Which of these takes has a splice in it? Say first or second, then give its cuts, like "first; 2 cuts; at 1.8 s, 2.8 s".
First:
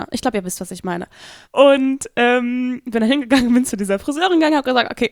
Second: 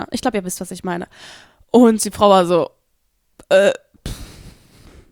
first; 1 cut; at 1.4 s